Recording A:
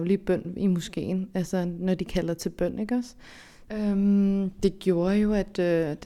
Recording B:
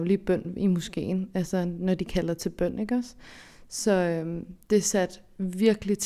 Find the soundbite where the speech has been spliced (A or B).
A